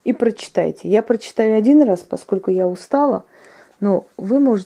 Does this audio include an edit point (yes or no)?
no